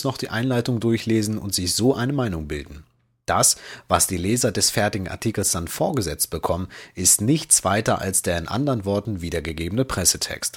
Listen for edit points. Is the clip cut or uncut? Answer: uncut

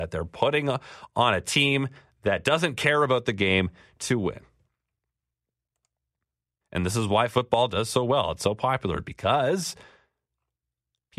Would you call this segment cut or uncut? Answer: cut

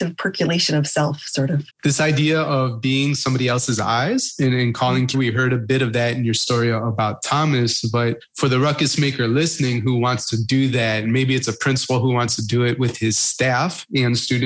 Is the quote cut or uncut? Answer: cut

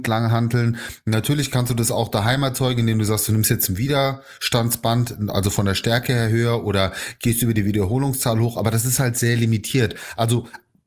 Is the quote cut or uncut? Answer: uncut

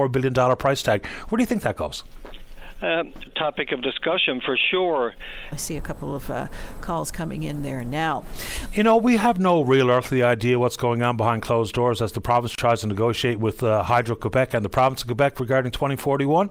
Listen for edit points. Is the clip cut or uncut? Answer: cut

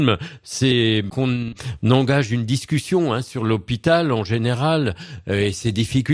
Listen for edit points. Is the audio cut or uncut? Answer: uncut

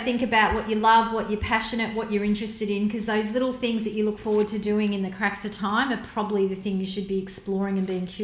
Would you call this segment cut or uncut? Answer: uncut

